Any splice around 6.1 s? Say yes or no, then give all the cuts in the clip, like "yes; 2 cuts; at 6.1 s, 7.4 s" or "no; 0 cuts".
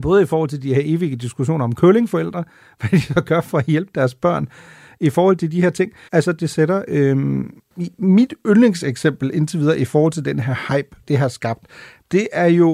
yes; 2 cuts; at 6.1 s, 11.0 s